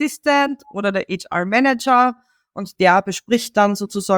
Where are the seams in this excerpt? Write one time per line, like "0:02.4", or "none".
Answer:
none